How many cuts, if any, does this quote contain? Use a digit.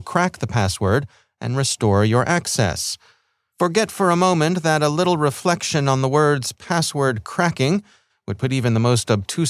0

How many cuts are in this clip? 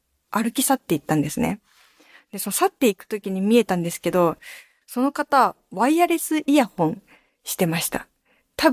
0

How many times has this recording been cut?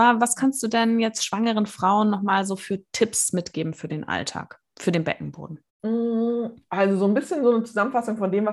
1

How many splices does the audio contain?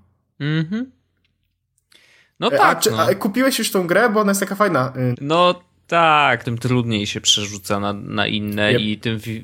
2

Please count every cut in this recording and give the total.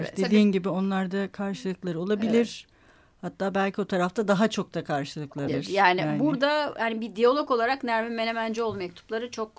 1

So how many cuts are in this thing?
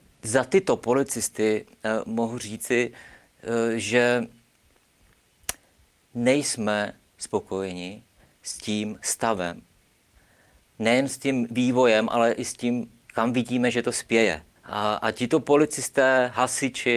1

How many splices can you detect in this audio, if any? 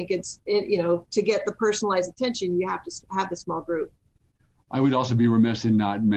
0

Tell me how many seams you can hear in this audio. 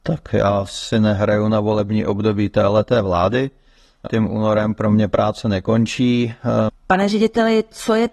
2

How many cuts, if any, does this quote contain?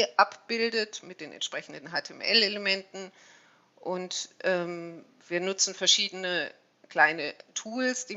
0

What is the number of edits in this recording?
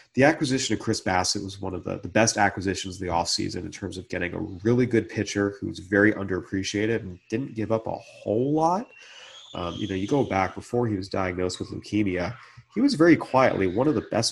1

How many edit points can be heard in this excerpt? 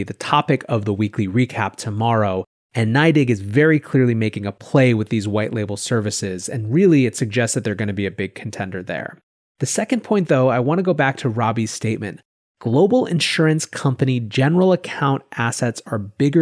0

